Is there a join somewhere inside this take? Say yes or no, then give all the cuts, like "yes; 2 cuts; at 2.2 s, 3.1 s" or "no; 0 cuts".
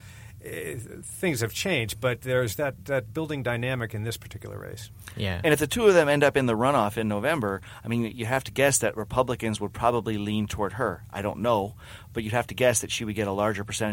no; 0 cuts